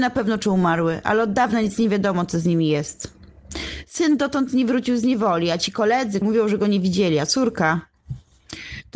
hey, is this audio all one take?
no; 1 cut; at 6.2 s

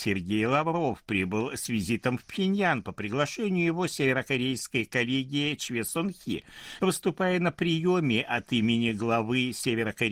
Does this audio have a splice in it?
yes; 1 cut; at 6.8 s

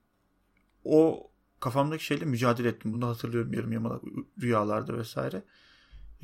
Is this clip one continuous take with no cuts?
yes; 0 cuts

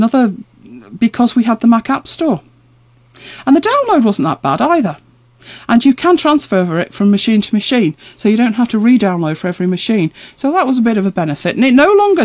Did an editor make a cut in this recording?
no; 0 cuts

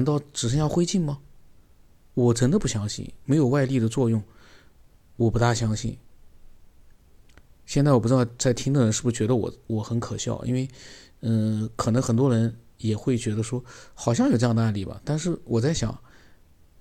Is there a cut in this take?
no; 0 cuts

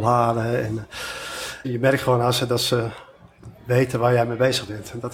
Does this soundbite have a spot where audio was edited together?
yes; 1 cut; at 1.6 s

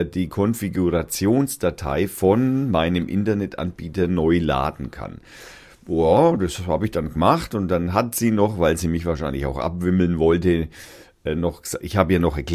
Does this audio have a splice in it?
no; 0 cuts

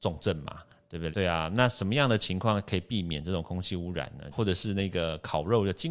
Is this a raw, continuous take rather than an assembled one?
no; 2 cuts; at 1.1 s, 4.3 s

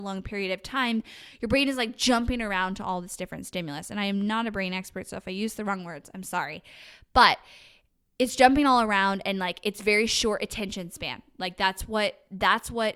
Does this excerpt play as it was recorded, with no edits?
yes; 0 cuts

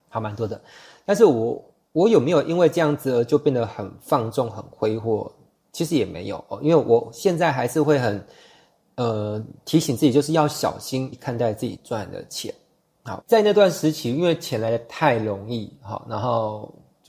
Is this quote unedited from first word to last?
no; 2 cuts; at 11.1 s, 13.2 s

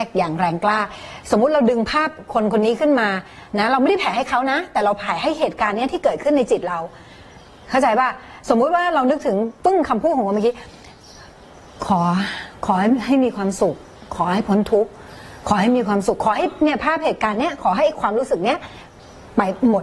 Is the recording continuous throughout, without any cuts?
yes; 0 cuts

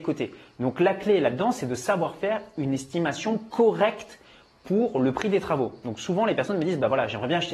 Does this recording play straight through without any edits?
yes; 0 cuts

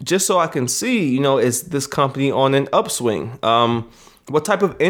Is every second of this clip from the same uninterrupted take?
yes; 0 cuts

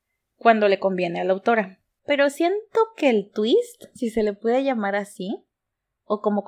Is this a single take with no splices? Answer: no; 1 cut; at 2.0 s

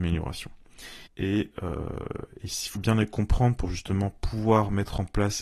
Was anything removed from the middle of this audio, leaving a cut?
yes; 2 cuts; at 1.1 s, 2.7 s

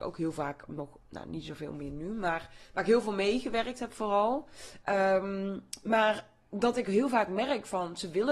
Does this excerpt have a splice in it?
yes; 1 cut; at 4.8 s

